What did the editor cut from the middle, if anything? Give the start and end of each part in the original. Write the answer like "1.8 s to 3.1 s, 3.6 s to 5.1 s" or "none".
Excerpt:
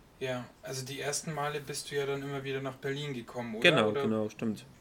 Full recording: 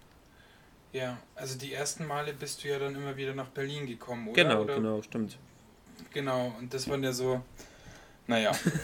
none